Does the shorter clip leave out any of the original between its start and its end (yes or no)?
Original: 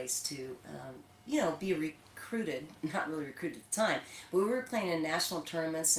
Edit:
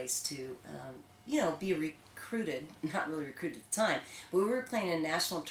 no